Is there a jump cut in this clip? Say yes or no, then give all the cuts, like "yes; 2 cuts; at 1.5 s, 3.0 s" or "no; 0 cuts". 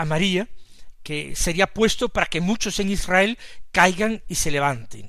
no; 0 cuts